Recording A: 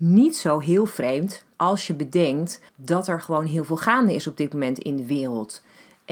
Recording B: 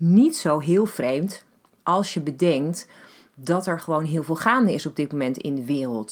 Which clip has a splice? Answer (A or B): A